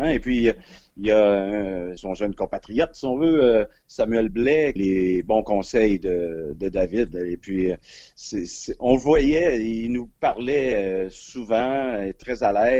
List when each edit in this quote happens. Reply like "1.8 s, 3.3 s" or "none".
2.0 s, 4.8 s